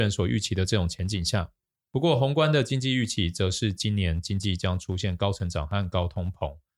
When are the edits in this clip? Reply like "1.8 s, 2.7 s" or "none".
1.7 s